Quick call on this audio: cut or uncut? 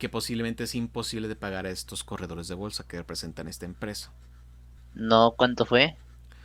cut